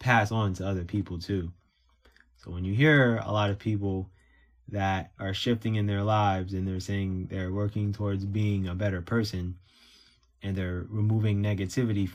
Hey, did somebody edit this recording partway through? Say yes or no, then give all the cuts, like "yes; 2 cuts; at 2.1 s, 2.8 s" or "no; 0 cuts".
no; 0 cuts